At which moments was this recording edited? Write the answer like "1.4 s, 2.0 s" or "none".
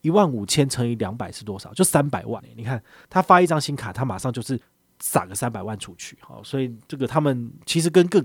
none